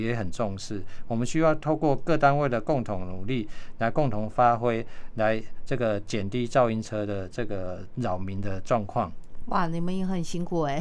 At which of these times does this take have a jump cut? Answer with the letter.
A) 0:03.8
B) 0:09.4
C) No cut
C